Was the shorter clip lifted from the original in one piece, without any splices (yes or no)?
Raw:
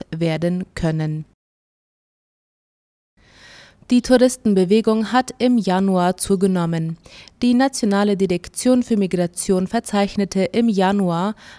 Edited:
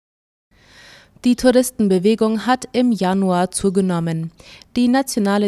yes